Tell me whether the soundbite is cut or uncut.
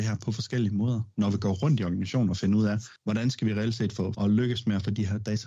cut